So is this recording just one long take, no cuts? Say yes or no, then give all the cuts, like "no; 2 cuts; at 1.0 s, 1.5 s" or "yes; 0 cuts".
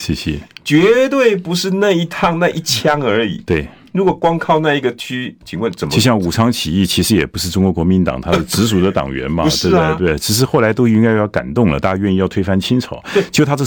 yes; 0 cuts